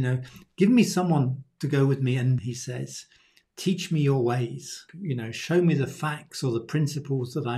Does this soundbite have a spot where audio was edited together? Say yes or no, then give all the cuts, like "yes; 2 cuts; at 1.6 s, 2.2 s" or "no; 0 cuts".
yes; 2 cuts; at 2.4 s, 4.9 s